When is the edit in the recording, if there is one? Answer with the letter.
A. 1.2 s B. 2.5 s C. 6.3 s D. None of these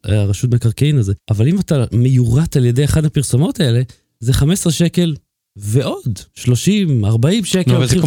A